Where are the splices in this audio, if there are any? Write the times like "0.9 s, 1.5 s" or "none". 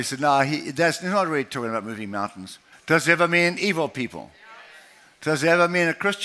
2.7 s